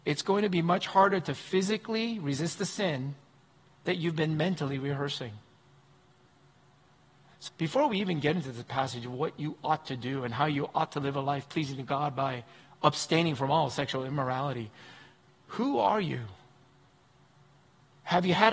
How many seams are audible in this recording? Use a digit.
1